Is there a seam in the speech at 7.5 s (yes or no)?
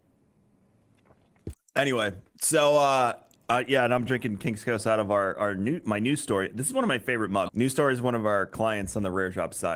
yes